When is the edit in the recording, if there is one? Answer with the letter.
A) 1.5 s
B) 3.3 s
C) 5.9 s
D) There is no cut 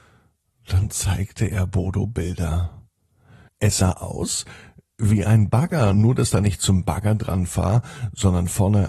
D